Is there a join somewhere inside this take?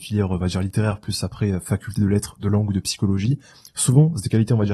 no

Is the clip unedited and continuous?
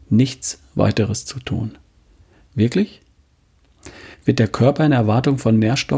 no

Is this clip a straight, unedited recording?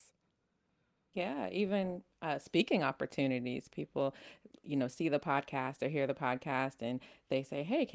yes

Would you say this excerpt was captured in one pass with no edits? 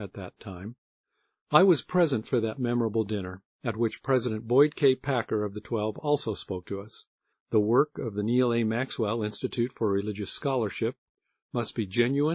no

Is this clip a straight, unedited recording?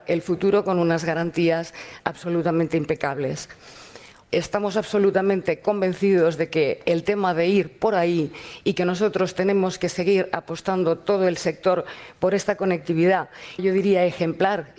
no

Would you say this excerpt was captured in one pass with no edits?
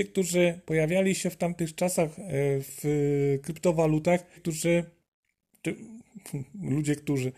no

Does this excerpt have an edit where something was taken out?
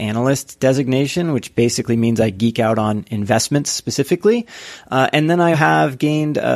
yes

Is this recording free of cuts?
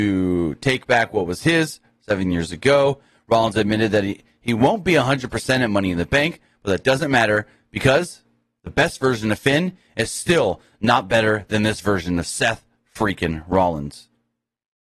yes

